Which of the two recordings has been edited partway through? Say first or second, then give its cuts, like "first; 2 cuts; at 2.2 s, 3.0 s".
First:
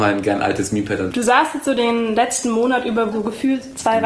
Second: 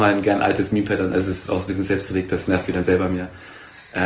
first; 2 cuts; at 1.1 s, 3.1 s